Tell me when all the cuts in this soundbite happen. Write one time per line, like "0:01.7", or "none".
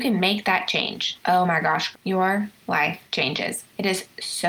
0:01.2